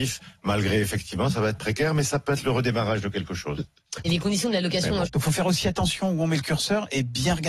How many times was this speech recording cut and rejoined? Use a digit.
2